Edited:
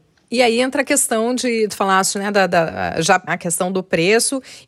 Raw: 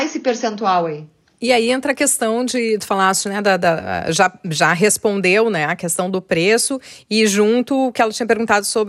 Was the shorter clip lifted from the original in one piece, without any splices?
no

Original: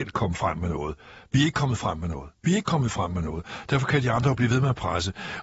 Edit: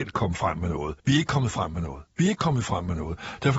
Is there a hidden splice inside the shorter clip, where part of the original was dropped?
yes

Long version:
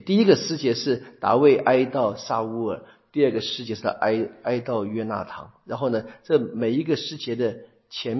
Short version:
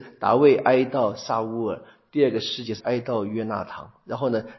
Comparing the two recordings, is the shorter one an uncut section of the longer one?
no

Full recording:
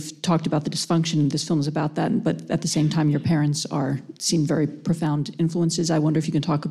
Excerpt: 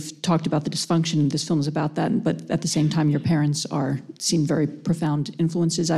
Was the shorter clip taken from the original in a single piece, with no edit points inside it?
yes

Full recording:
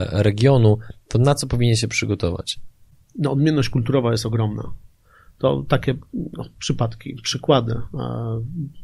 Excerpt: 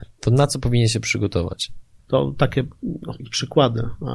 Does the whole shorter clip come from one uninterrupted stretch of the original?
no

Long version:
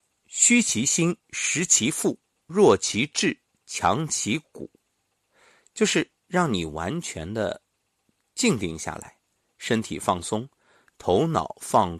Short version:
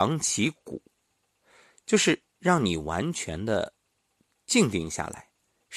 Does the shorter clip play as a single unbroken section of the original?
yes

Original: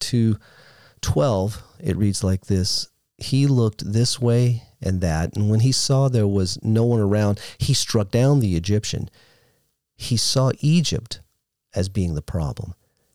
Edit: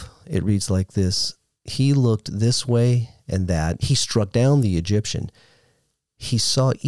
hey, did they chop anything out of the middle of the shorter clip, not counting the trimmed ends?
yes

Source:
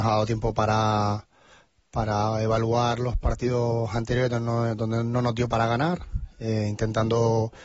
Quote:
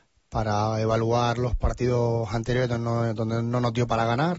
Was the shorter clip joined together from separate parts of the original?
no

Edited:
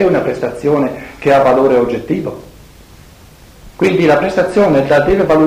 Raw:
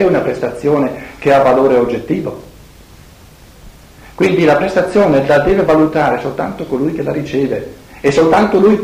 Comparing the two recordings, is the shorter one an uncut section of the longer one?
no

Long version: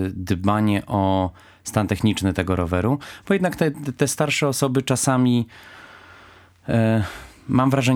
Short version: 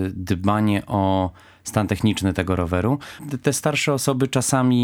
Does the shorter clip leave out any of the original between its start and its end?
yes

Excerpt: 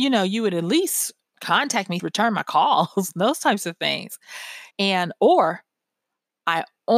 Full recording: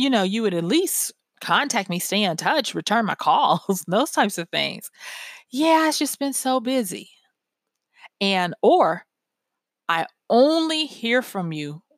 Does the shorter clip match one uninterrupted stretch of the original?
no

